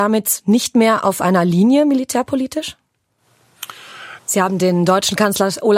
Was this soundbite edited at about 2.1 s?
no; 1 cut; at 4.2 s

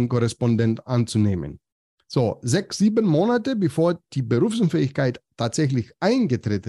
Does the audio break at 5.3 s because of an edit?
no; 1 cut; at 2.0 s

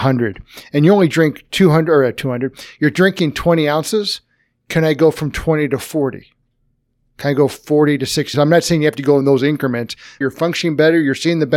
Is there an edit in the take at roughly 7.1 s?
no; 2 cuts; at 8.3 s, 10.2 s

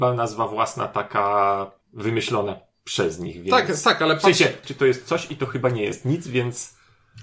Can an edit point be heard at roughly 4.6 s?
yes; 2 cuts; at 1.8 s, 4.6 s

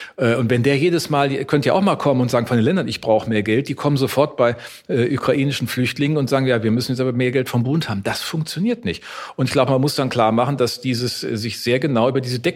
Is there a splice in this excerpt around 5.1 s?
no; 0 cuts

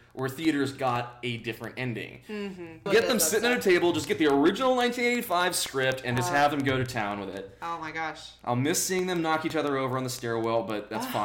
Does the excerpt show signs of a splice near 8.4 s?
no; 1 cut; at 2.9 s

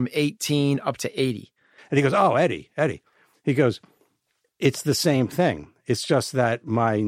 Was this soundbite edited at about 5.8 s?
no; 1 cut; at 1.8 s

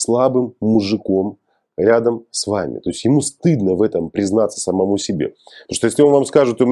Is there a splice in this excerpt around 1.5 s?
no; 0 cuts

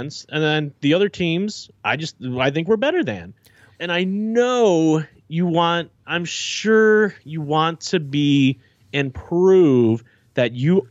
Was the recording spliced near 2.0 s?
no; 2 cuts; at 3.7 s, 6.0 s

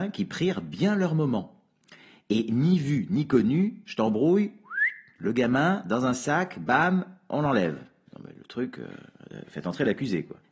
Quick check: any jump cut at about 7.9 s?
no; 0 cuts

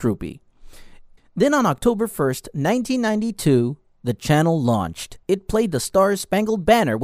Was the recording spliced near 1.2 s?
yes; 2 cuts; at 1.2 s, 5.2 s

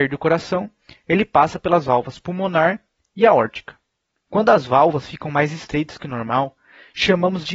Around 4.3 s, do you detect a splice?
yes; 1 cut; at 4.3 s

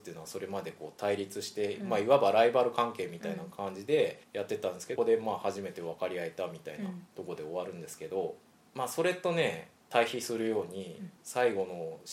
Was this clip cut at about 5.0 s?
yes; 1 cut; at 5.0 s

